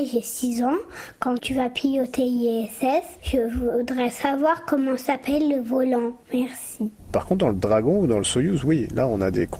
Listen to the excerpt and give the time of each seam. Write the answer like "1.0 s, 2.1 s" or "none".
7.1 s

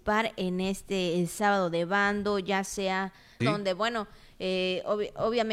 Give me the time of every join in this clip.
3.4 s

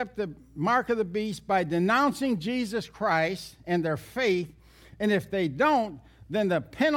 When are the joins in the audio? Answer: none

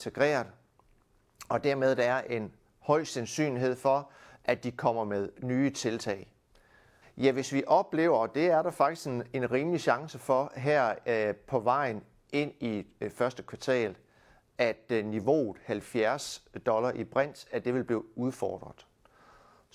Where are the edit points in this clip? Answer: 7.0 s

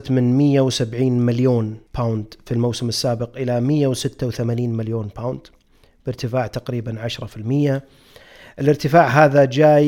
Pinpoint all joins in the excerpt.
1.9 s

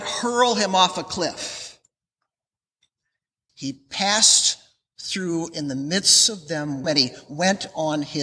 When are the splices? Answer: 3.5 s, 6.8 s

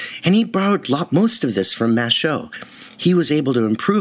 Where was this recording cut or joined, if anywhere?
none

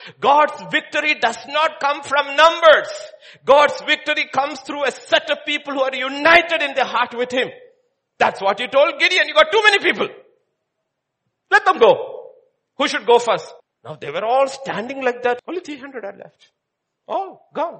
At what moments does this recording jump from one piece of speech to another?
13.6 s, 15.4 s

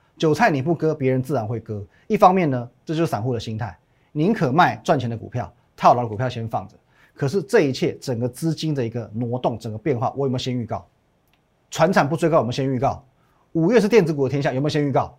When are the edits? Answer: none

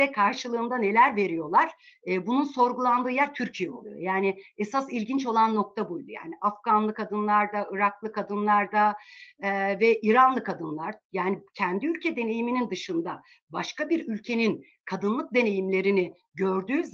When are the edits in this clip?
none

